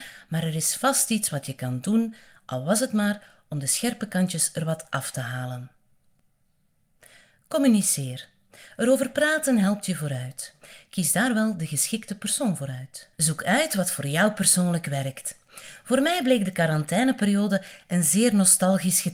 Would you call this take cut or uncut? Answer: cut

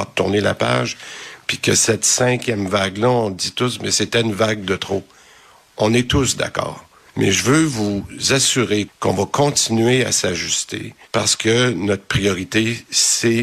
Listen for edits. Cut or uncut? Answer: cut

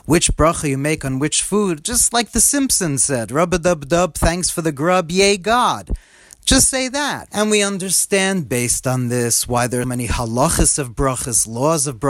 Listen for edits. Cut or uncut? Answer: cut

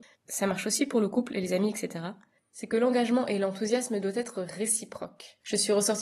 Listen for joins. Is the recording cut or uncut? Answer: uncut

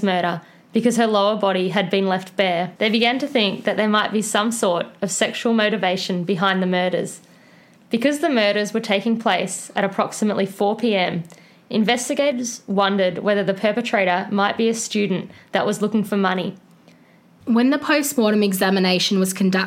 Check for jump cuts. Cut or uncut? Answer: cut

